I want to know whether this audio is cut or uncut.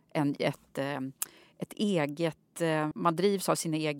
cut